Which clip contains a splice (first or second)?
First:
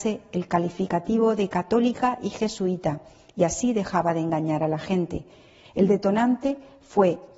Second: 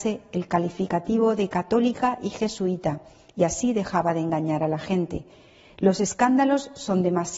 first